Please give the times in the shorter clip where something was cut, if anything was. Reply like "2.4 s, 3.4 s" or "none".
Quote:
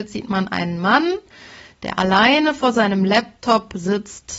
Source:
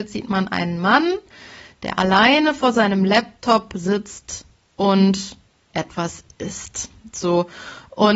none